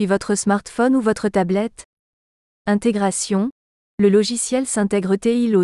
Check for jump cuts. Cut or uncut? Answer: uncut